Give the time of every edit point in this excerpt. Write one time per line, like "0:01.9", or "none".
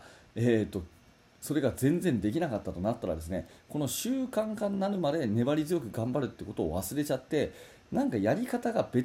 none